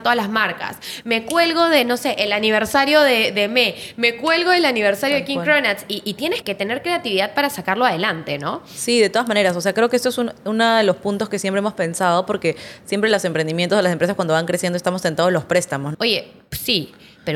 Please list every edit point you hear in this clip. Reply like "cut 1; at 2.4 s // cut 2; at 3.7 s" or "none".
cut 1; at 6.4 s // cut 2; at 15.9 s